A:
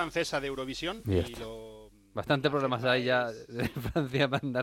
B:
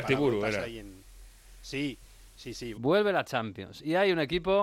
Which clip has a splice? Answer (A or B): B